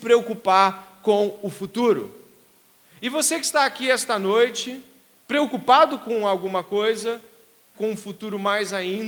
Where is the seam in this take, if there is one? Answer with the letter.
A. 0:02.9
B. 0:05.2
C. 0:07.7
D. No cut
C